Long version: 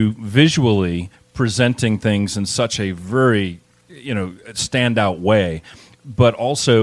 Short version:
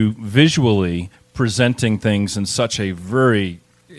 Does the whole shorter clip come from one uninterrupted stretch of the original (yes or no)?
yes